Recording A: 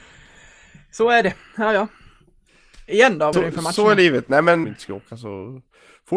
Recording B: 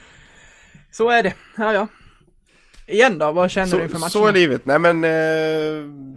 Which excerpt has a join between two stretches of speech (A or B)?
A